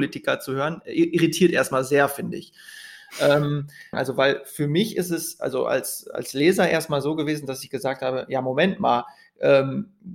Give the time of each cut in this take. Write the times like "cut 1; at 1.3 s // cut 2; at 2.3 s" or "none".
cut 1; at 3.9 s